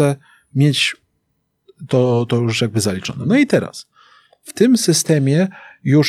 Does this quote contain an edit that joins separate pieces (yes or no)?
no